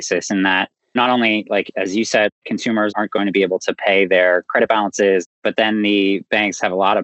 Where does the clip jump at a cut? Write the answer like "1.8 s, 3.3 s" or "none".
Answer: none